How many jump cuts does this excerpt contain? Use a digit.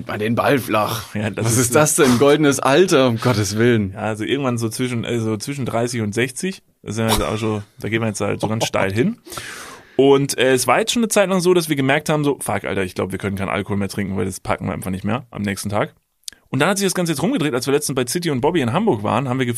0